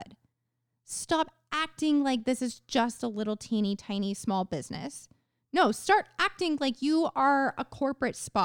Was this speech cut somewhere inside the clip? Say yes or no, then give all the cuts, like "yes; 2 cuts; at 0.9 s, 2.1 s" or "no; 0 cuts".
no; 0 cuts